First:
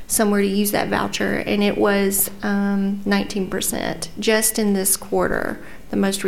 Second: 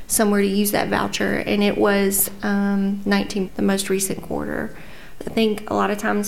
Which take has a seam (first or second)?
second